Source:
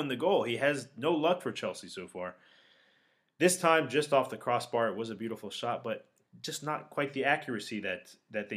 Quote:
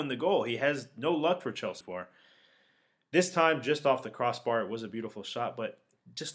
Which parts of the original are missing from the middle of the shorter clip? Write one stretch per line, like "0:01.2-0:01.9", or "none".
0:01.8-0:02.1